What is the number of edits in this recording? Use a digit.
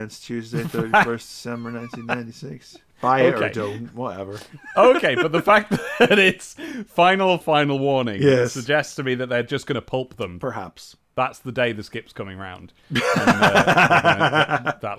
1